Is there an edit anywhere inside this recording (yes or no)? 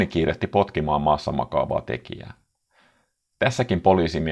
no